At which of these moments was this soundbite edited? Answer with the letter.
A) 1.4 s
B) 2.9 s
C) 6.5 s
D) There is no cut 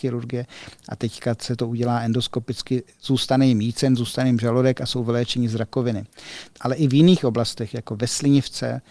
C